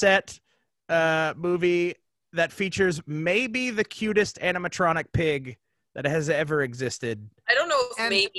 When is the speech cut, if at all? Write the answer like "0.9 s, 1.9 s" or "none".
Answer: none